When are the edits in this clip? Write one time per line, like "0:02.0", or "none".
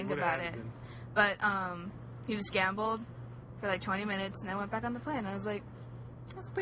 none